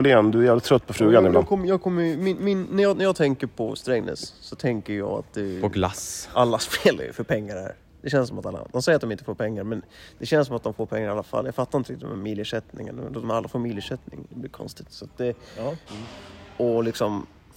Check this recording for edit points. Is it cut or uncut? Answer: cut